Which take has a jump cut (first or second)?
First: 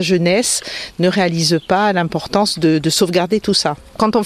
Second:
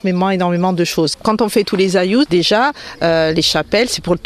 second